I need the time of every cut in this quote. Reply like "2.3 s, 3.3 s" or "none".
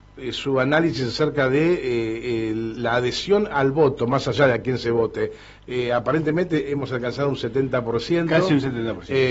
none